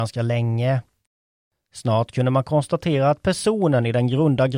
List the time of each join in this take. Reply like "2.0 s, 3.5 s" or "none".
none